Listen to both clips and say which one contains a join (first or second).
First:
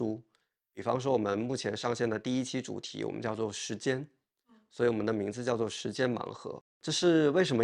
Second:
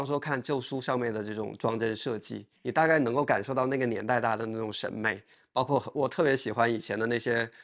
second